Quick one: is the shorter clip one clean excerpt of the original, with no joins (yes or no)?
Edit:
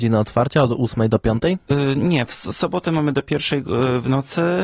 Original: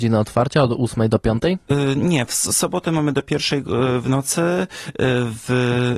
yes